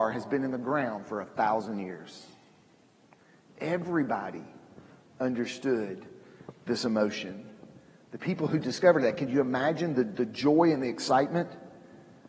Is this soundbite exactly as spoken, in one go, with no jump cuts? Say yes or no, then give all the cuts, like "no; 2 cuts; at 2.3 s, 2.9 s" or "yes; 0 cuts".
yes; 0 cuts